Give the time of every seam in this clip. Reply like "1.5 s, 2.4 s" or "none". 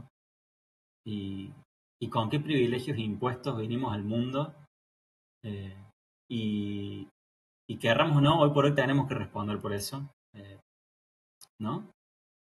10.3 s, 11.5 s